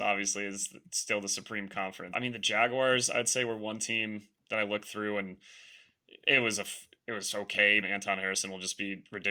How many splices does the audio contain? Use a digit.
2